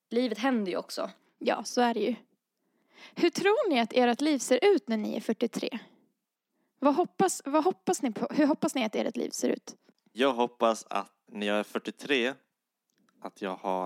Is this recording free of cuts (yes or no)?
no